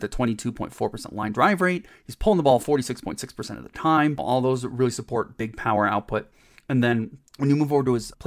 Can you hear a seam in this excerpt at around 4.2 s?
no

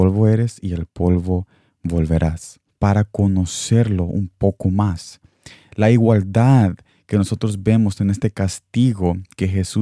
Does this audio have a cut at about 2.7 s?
yes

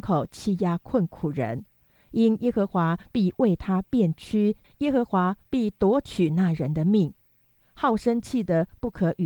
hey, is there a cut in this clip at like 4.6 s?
yes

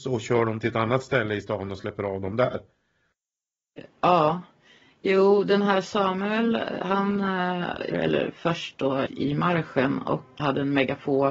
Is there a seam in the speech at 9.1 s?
yes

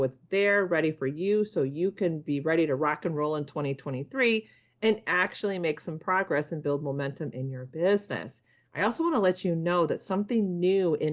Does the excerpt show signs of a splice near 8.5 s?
no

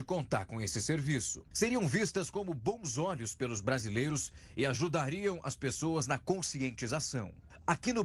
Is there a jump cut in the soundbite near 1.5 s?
yes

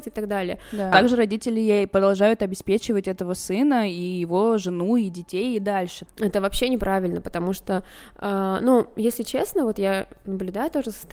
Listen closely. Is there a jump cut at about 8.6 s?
no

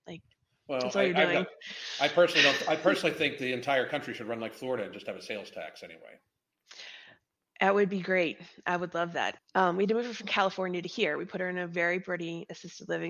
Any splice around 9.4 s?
yes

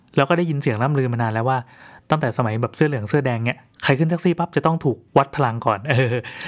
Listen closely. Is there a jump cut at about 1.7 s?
no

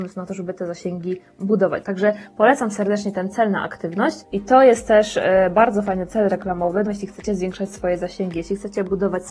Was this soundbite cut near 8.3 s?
no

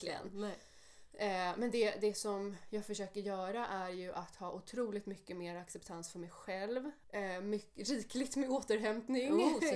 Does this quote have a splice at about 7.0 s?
yes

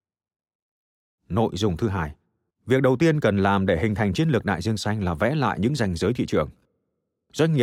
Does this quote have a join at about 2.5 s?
yes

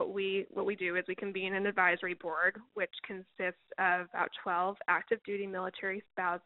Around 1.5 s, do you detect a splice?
no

